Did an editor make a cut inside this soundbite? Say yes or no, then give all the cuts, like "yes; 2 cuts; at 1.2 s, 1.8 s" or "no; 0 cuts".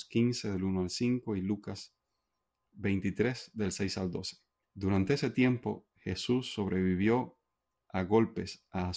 yes; 1 cut; at 4.6 s